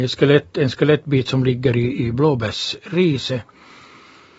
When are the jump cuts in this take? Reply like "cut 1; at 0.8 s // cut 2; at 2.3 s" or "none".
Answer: none